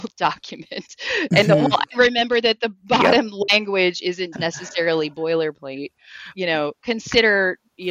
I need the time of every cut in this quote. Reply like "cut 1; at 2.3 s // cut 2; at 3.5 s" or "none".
cut 1; at 4.3 s // cut 2; at 6.3 s